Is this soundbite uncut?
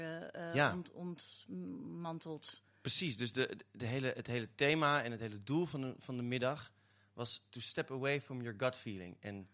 yes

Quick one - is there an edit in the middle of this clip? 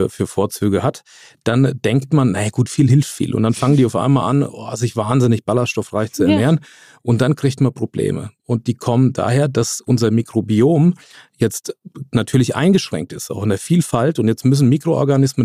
no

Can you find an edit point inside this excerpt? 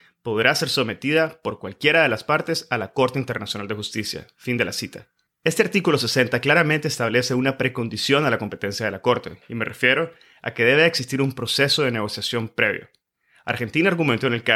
no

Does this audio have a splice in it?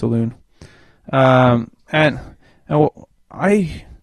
no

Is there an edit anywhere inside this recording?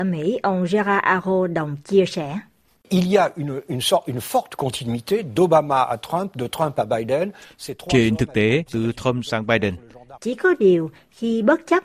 yes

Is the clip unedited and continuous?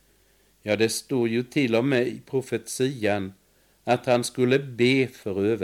yes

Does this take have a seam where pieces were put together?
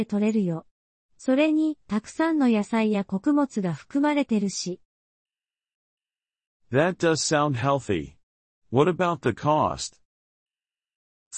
no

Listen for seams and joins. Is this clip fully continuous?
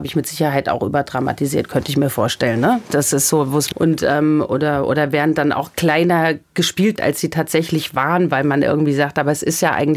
no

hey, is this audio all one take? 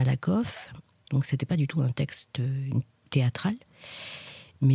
no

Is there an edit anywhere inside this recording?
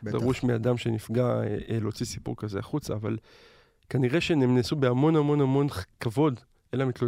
no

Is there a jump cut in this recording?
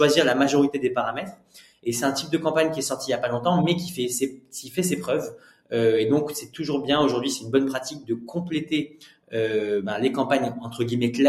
no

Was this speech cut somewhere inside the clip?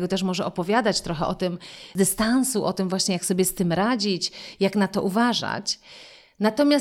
no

